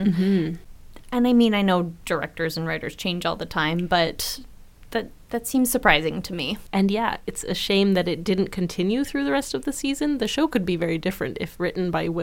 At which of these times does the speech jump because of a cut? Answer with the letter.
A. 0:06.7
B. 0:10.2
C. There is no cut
A